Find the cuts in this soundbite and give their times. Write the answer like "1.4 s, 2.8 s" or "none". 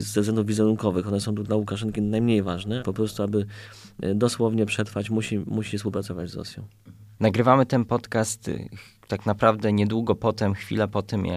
2.8 s

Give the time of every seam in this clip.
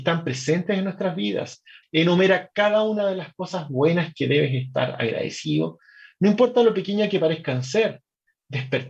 1.8 s

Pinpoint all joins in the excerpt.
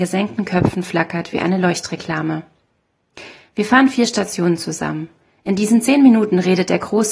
none

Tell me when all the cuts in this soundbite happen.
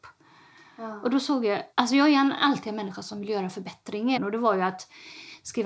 1.7 s, 4.2 s

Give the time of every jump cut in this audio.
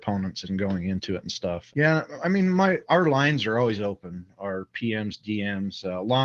1.7 s

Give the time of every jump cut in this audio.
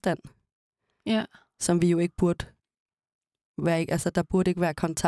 none

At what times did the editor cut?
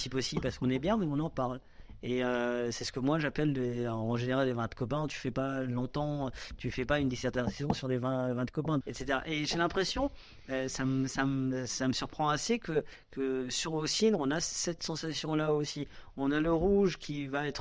8.8 s

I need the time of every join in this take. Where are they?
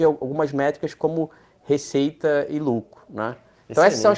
none

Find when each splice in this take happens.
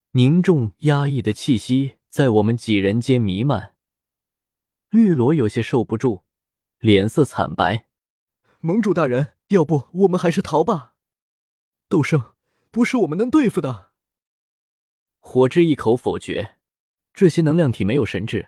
9.4 s

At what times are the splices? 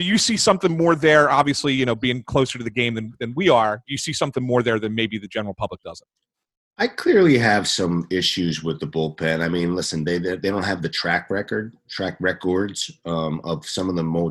11.8 s

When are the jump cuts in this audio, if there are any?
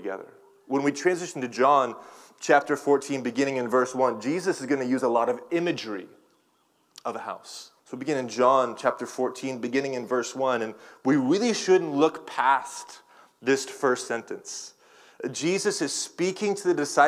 7.8 s

